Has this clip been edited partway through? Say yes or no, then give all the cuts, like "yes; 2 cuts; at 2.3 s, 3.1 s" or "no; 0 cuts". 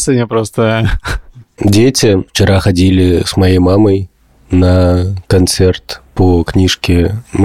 no; 0 cuts